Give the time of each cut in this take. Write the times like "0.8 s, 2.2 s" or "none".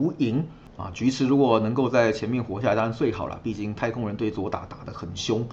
none